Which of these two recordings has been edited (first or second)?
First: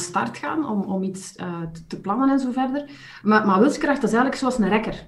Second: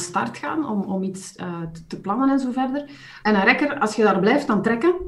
second